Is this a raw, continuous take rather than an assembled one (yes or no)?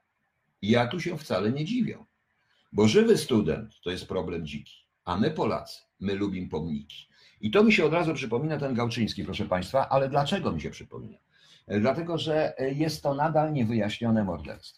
yes